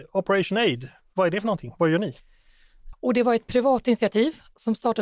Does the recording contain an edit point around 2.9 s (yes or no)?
yes